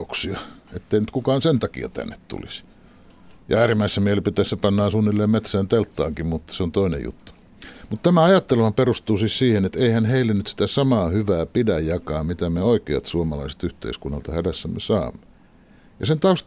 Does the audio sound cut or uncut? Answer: uncut